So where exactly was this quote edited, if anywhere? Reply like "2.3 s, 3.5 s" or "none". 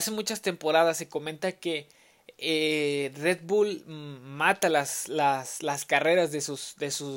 none